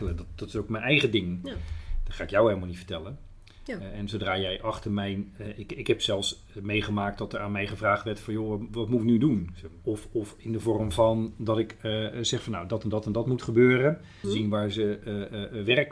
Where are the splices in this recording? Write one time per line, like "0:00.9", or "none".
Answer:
0:08.7
0:09.8
0:14.2